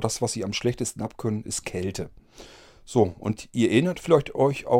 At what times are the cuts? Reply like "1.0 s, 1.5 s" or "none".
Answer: none

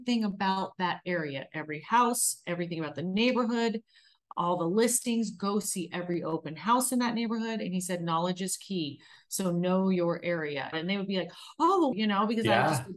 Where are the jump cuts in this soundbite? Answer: 10.7 s, 11.9 s

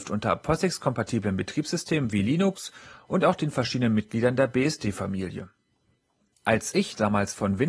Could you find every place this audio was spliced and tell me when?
6.3 s

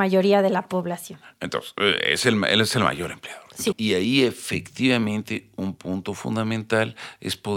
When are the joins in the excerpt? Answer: 3.7 s

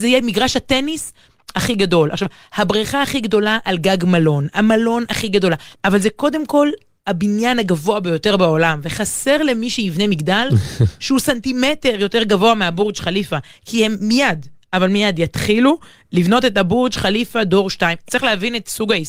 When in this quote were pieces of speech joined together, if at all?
5.7 s, 18.1 s

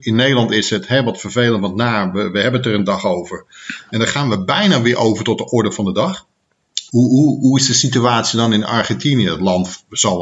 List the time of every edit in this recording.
6.9 s

